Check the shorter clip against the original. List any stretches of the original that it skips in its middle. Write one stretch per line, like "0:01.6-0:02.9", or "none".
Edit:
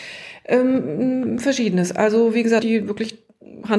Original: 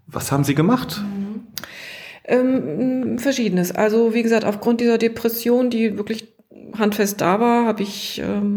0:04.4-0:05.7